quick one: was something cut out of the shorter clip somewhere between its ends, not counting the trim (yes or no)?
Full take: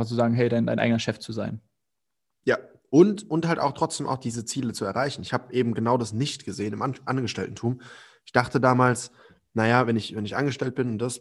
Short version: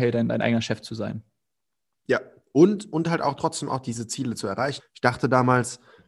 yes